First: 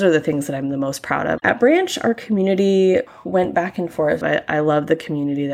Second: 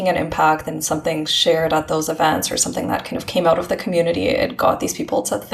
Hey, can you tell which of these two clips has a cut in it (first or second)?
first